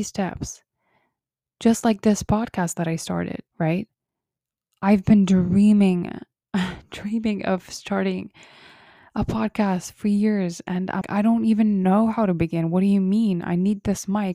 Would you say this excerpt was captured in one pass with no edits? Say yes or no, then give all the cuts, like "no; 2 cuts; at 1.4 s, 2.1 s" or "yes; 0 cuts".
no; 2 cuts; at 3.5 s, 11.0 s